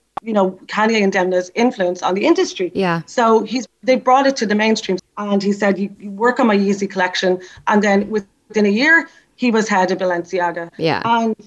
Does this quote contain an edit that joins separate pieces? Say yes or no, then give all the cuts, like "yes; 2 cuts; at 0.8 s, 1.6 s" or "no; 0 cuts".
yes; 1 cut; at 5.0 s